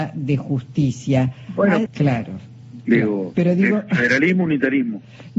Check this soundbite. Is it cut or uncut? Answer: cut